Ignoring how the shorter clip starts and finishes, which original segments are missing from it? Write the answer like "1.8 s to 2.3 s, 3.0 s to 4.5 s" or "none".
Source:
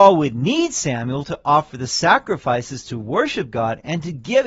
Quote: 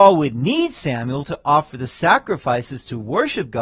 none